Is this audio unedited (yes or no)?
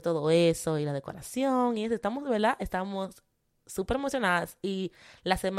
yes